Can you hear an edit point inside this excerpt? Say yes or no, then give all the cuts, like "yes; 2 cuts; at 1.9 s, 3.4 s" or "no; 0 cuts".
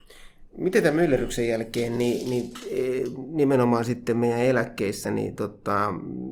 no; 0 cuts